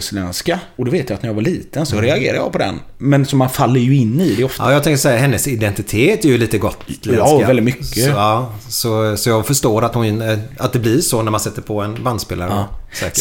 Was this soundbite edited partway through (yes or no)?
no